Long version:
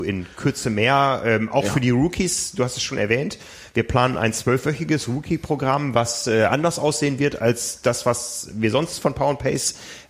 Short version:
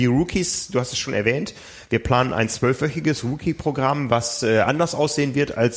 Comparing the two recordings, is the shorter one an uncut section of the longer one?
yes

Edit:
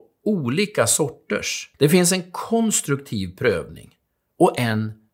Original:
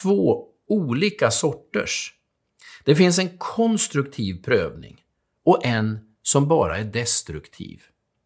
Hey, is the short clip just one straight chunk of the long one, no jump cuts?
no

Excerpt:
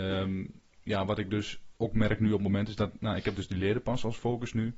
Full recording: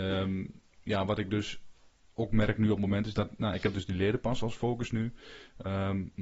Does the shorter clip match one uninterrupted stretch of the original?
no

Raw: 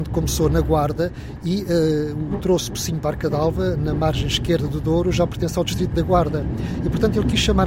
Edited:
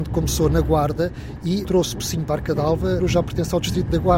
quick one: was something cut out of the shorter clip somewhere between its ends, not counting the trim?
yes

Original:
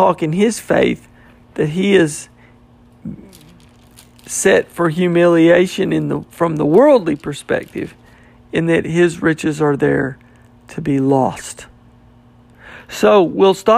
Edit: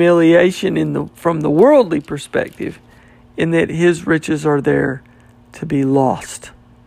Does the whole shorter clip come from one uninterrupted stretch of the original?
yes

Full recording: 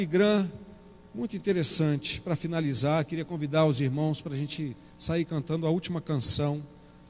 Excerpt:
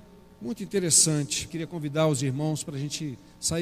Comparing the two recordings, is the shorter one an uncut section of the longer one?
no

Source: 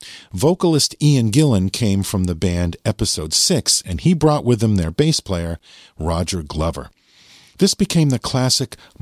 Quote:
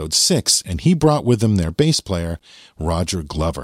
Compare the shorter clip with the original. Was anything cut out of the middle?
no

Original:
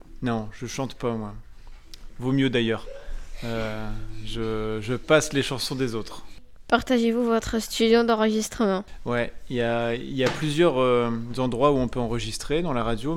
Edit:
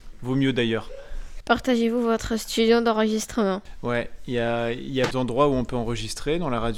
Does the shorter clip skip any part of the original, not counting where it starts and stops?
yes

